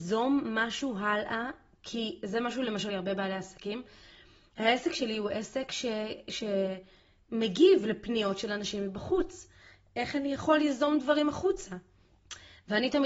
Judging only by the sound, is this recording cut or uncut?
cut